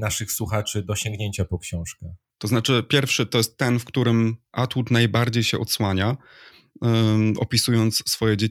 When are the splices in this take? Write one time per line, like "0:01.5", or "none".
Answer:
0:02.3